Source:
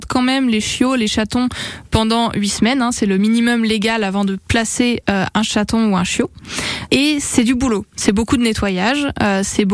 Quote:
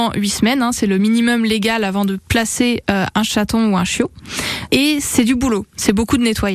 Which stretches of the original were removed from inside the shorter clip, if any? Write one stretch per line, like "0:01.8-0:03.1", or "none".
none